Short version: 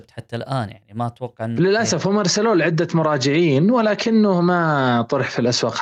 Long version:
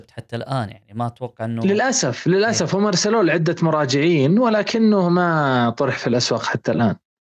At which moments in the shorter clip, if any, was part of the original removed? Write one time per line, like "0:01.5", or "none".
0:01.6